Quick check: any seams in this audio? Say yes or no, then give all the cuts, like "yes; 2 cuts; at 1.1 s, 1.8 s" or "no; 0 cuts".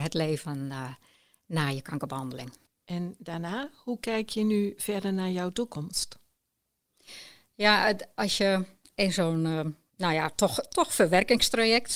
yes; 1 cut; at 2.7 s